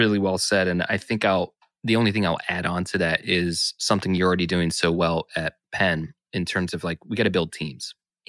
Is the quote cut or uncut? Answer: uncut